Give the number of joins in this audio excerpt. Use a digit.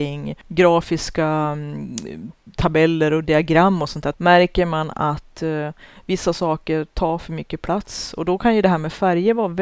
1